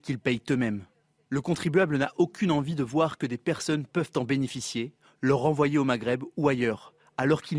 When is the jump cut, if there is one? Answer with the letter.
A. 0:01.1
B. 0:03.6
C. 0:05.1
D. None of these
D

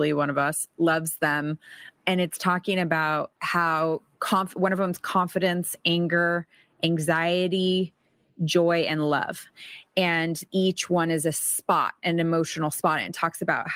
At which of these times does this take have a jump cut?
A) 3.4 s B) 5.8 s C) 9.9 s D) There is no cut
A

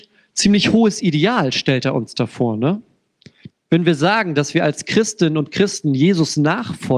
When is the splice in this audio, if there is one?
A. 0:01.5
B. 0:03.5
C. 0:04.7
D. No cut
B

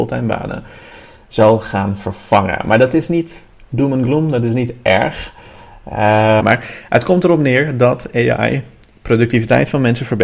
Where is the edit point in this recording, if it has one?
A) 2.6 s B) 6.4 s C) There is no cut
B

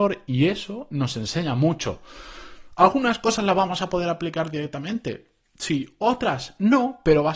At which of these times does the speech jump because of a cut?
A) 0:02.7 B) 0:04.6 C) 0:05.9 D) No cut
D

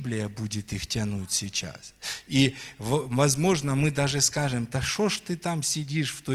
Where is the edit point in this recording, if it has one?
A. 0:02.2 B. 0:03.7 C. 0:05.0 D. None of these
D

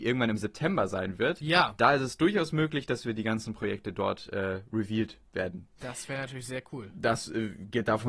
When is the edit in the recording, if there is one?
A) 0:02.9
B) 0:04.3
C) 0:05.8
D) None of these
C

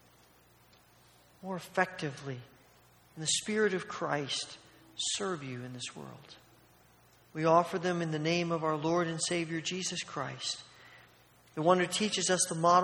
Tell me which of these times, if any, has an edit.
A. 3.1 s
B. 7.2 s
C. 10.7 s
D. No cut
B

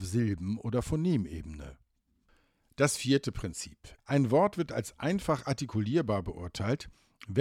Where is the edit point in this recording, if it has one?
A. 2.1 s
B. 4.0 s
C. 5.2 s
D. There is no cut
B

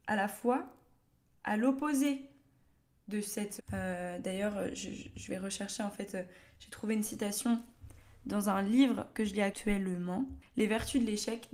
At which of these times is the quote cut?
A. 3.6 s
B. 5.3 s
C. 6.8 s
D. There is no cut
A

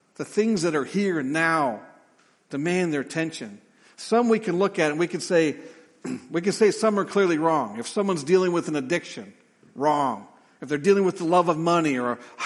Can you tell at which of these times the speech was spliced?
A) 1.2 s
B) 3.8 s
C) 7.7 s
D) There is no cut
D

